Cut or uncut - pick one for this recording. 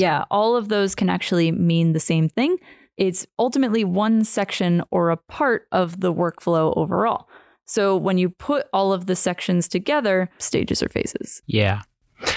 cut